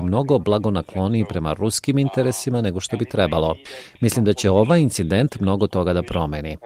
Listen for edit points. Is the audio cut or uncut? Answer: uncut